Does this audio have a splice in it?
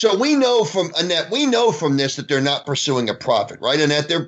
no; 0 cuts

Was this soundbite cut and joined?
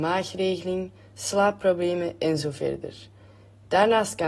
no; 0 cuts

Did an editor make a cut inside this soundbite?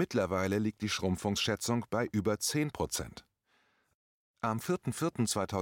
no; 0 cuts

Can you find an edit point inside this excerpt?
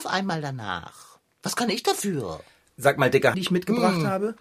yes; 1 cut; at 3.3 s

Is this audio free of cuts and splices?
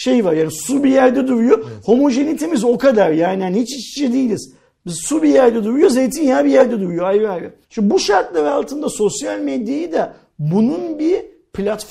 no; 1 cut; at 7.6 s

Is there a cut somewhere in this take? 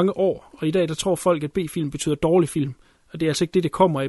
no; 0 cuts

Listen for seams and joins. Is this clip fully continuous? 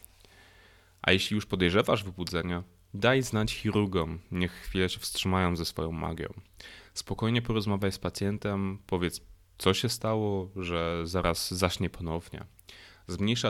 yes; 0 cuts

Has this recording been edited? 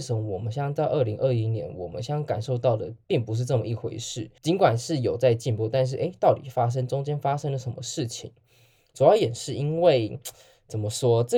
yes; 1 cut; at 4.4 s

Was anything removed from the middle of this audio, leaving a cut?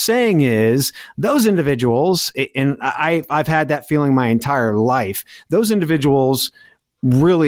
no; 0 cuts

